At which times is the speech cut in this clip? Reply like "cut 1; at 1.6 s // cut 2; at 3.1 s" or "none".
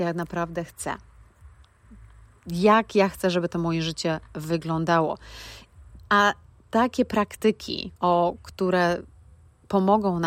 cut 1; at 6.0 s // cut 2; at 8.0 s